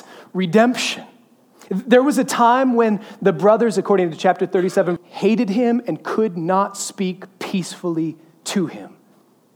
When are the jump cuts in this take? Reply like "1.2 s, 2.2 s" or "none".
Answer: 5.0 s